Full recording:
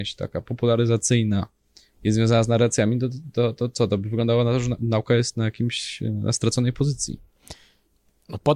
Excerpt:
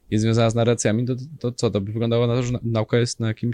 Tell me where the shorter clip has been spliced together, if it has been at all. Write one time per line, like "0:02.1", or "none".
0:01.4